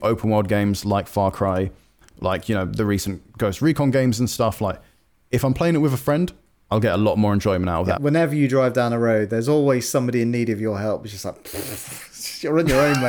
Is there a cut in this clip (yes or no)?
yes